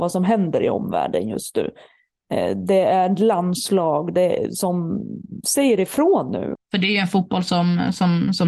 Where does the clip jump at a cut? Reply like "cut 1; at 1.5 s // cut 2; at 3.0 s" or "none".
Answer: cut 1; at 6.5 s